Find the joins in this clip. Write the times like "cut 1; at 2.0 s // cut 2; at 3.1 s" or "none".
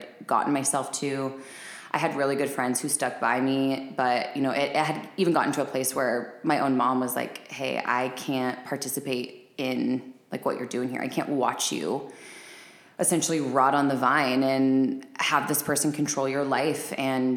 none